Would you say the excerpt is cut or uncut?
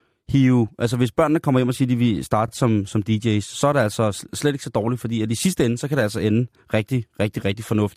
uncut